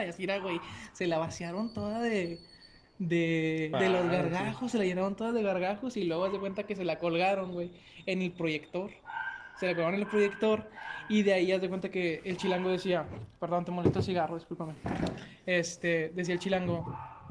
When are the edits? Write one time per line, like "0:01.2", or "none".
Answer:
0:03.7